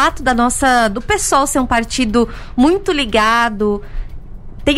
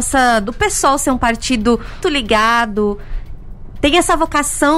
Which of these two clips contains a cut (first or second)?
second